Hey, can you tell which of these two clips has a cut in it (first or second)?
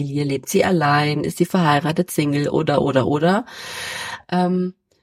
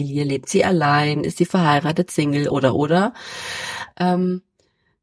second